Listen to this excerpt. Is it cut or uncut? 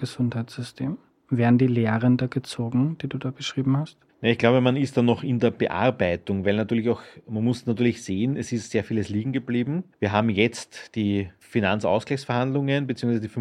uncut